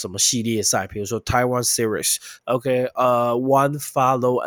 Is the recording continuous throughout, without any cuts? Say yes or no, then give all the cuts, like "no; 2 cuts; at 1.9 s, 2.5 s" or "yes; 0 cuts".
no; 1 cut; at 2.4 s